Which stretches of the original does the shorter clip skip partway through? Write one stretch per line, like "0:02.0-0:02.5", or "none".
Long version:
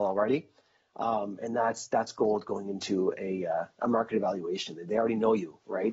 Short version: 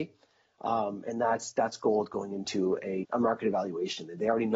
0:03.4-0:03.7

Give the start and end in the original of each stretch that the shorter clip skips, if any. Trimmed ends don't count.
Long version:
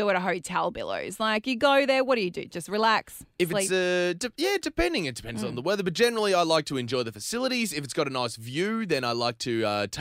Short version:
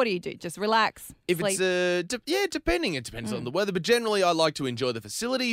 none

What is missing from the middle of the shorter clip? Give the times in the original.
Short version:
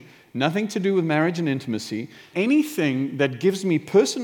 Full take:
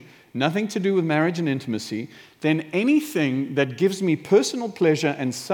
0:02.3-0:02.7

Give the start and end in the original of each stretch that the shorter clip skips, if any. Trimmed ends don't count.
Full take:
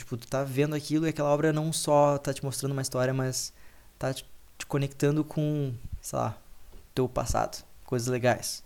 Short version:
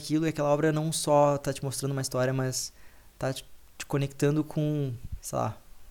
none

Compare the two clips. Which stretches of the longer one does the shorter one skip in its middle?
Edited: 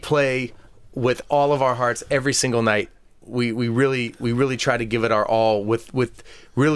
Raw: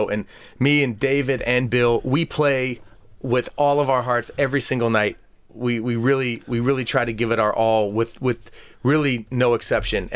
none

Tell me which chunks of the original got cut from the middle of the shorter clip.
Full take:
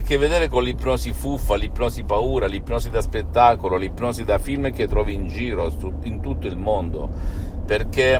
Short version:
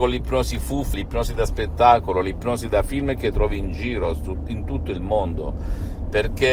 0:01.5-0:02.5

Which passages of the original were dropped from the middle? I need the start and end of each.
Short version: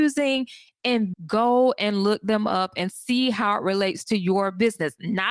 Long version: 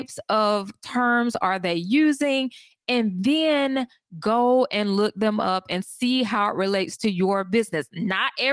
0:03.2-0:04.1

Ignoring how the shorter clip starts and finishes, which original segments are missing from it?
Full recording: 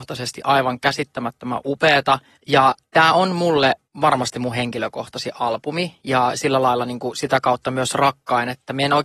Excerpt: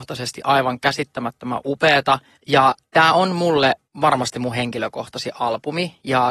none

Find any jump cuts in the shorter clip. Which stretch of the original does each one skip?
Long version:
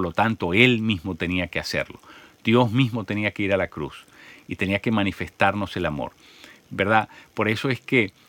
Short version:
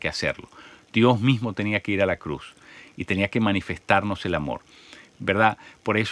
none

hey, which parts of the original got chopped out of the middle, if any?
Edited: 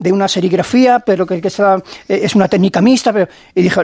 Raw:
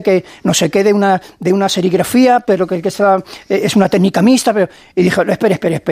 none

